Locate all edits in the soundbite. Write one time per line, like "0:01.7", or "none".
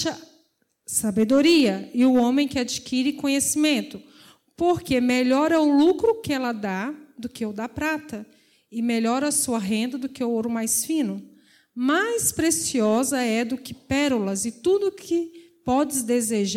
none